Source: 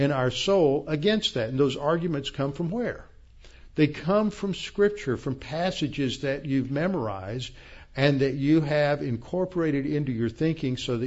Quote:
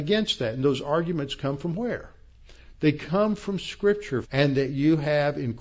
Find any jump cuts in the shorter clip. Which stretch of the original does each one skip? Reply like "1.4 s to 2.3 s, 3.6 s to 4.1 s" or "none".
5.2 s to 7.9 s

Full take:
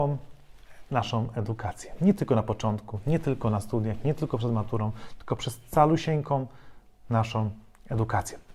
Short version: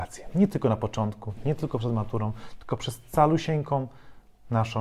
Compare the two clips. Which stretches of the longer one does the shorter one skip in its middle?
3.0 s to 4.0 s

